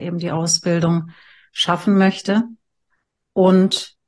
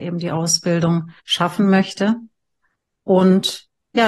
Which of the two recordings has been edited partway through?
second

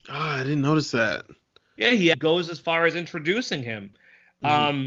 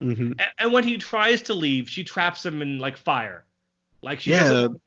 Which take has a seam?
first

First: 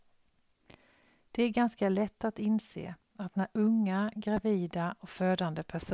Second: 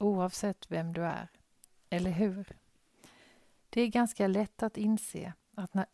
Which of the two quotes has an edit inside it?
second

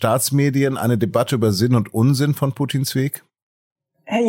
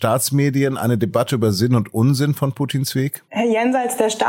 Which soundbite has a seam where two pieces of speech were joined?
second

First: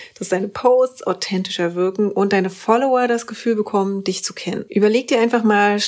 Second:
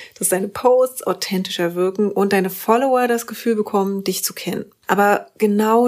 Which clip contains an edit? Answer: first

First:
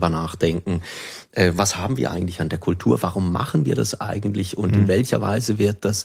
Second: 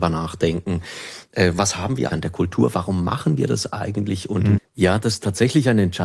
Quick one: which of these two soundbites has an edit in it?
second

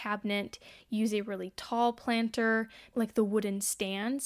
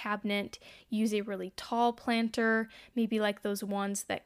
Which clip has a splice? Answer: first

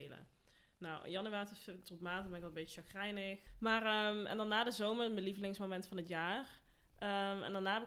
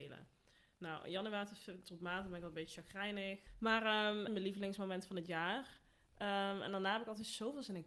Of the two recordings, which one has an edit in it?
second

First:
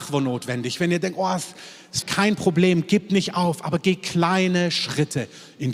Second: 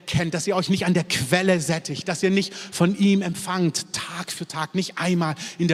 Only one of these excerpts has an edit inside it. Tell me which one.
first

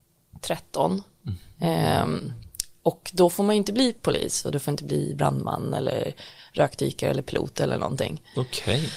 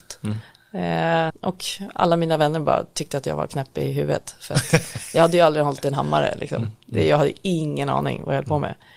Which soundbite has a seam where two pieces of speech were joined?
second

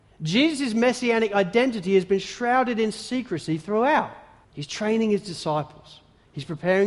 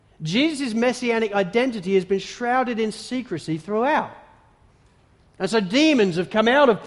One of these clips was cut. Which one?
first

